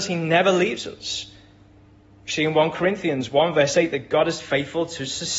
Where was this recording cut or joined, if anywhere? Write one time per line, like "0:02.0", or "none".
none